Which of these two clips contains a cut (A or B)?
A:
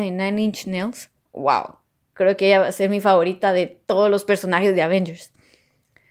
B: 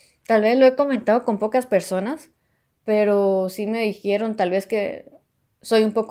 A